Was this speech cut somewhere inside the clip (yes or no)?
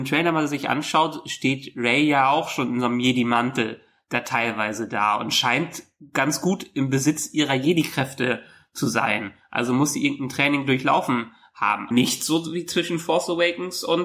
yes